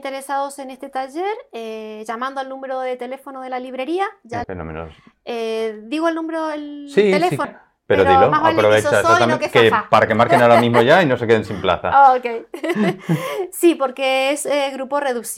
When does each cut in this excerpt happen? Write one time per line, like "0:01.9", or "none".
0:04.4
0:07.4